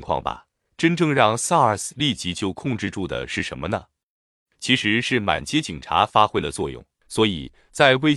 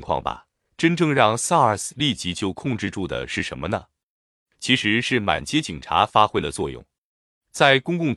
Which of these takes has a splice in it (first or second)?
first